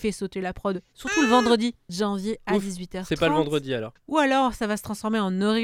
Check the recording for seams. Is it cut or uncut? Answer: cut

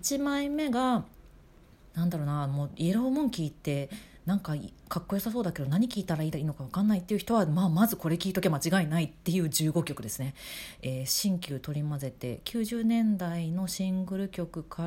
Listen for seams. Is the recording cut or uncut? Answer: uncut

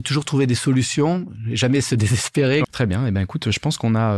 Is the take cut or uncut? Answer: cut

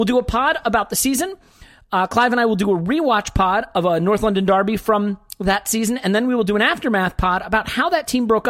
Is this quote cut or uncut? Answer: uncut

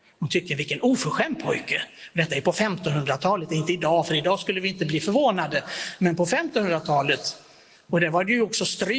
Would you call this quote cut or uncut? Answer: uncut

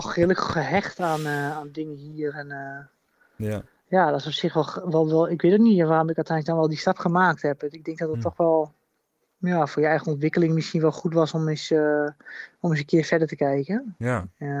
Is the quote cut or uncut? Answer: uncut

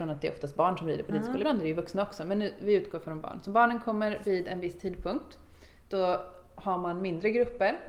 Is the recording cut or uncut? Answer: uncut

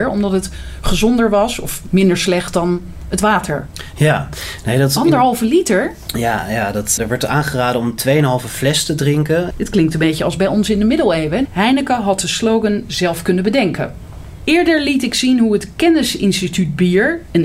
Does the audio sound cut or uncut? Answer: cut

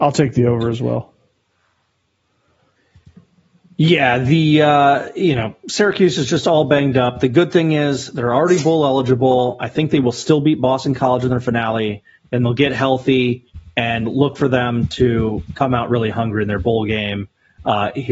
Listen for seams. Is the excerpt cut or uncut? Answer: uncut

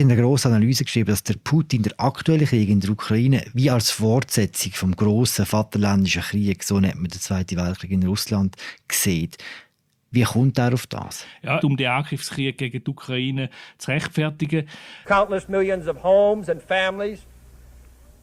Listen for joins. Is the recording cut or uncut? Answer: cut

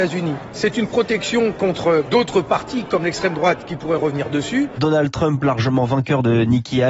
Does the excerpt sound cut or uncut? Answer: cut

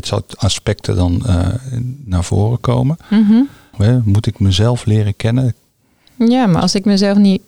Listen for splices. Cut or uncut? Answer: cut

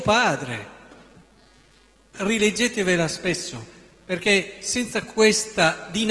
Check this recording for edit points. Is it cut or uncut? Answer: cut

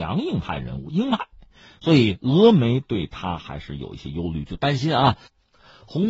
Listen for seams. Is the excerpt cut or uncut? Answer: uncut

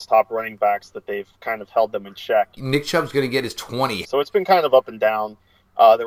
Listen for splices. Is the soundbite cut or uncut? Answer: cut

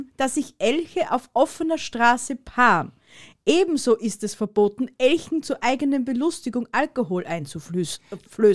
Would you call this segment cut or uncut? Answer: uncut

